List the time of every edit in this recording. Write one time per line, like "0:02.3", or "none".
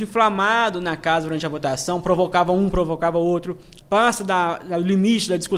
0:03.8